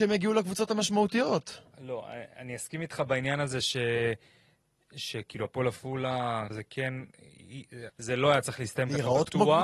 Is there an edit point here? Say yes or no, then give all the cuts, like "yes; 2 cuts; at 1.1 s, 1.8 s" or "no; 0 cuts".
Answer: yes; 2 cuts; at 6.5 s, 7.9 s